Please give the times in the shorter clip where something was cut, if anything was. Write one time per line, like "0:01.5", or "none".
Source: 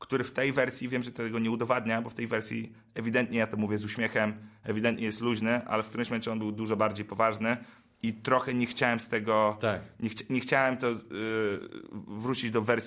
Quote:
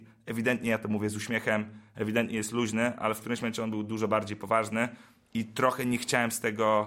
none